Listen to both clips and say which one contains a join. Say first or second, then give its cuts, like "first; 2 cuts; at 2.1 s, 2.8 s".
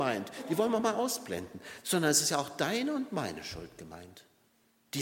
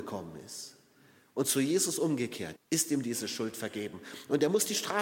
second; 1 cut; at 2.6 s